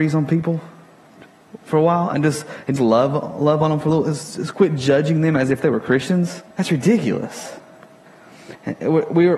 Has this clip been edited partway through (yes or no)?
yes